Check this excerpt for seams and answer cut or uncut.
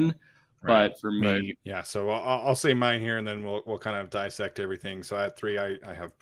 cut